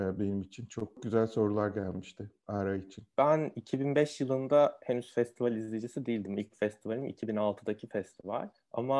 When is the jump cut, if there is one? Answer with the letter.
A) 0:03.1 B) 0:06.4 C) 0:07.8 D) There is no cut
D